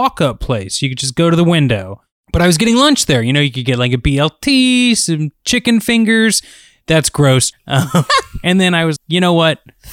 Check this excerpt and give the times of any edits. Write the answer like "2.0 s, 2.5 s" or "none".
7.5 s, 9.0 s